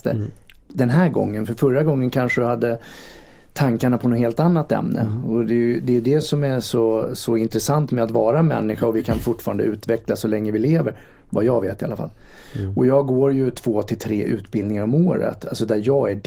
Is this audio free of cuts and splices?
yes; 0 cuts

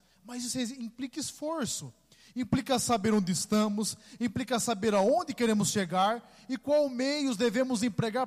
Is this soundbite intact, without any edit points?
yes; 0 cuts

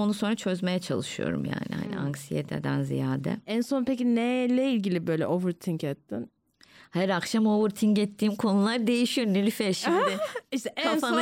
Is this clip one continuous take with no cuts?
yes; 0 cuts

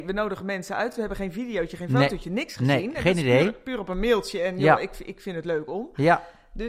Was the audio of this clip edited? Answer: no; 0 cuts

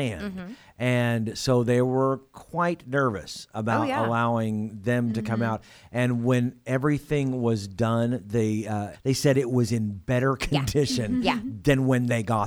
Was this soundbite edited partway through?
yes; 1 cut; at 8.9 s

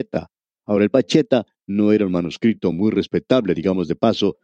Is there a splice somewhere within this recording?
no; 0 cuts

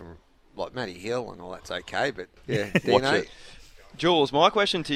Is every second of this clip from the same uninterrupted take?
no; 1 cut; at 2.4 s

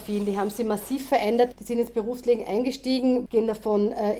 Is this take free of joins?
no; 2 cuts; at 1.5 s, 3.3 s

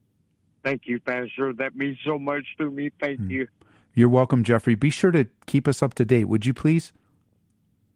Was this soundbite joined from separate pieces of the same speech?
no; 0 cuts

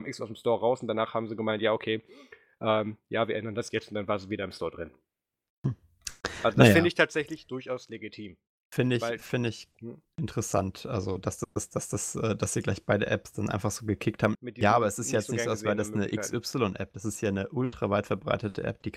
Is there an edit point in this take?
yes; 1 cut; at 14.3 s

